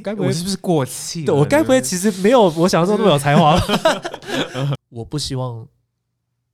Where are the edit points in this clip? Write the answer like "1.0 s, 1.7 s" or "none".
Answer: 4.7 s